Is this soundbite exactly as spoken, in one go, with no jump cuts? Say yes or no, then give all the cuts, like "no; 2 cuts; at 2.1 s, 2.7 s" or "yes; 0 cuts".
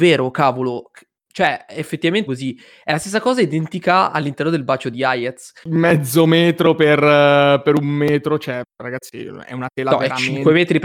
no; 2 cuts; at 2.3 s, 5.6 s